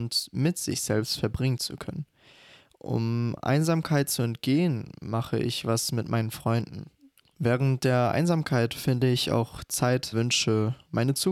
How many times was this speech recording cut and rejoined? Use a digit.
2